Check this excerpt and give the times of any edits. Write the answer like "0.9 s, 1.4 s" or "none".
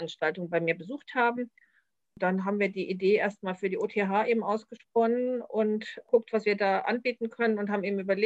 2.0 s